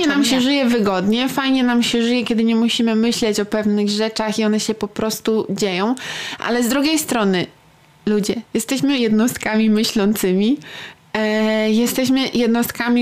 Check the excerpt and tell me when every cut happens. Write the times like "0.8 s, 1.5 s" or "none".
none